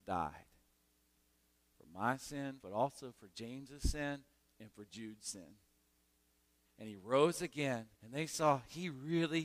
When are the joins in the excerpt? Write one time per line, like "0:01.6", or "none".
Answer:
0:02.6
0:06.6
0:07.9